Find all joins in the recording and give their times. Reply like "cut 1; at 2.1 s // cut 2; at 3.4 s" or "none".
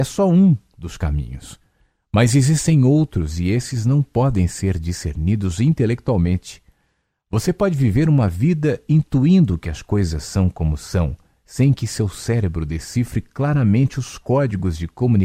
none